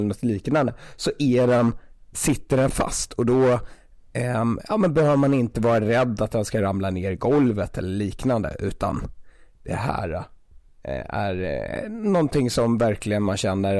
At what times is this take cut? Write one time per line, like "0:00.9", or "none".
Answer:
none